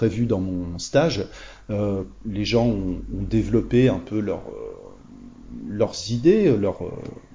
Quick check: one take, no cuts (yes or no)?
yes